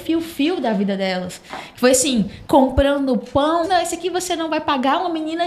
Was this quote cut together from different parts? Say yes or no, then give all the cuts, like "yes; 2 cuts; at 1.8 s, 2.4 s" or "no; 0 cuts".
yes; 2 cuts; at 2.4 s, 3.6 s